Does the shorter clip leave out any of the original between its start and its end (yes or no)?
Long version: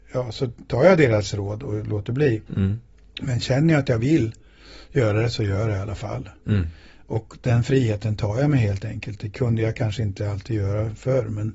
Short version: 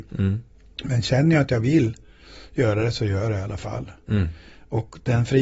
no